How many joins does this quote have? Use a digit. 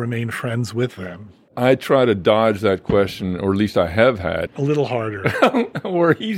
1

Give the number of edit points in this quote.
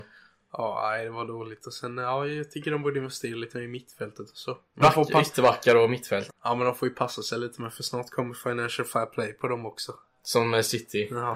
2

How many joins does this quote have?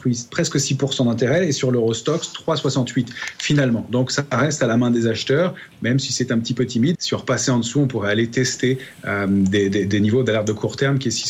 1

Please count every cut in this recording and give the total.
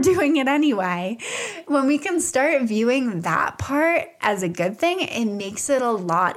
0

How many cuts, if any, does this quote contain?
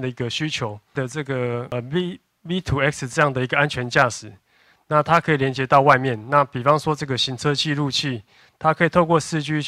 0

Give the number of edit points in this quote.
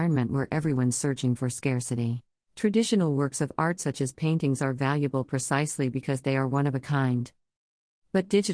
1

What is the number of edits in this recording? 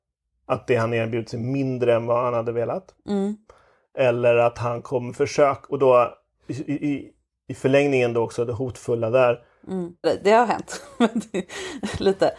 1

